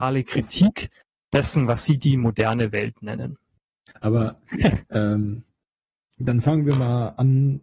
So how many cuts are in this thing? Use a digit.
1